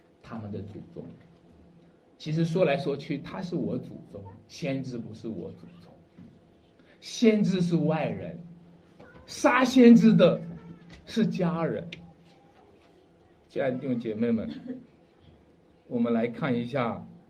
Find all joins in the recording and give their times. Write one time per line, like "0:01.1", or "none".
none